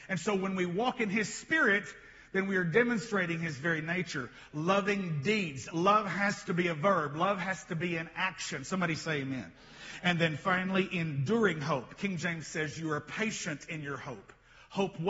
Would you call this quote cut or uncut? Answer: uncut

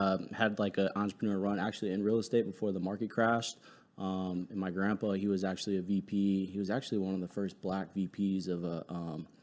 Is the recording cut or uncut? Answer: uncut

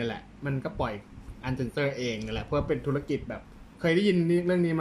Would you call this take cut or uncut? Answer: cut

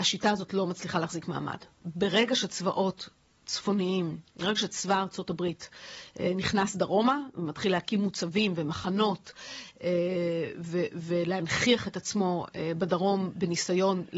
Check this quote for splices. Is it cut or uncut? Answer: uncut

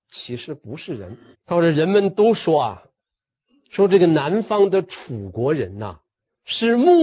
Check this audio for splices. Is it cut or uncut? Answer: cut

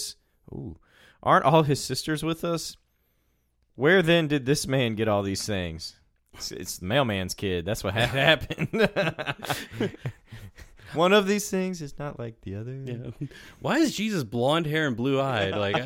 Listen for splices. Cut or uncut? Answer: uncut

